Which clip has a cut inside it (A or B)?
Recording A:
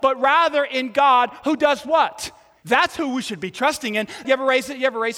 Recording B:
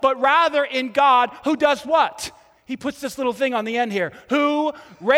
A